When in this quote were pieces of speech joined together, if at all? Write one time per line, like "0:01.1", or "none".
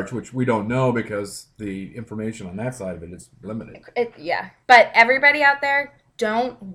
0:03.4
0:04.6